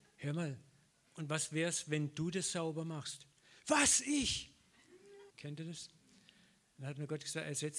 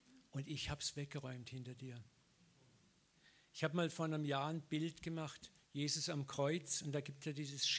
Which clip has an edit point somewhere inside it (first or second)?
first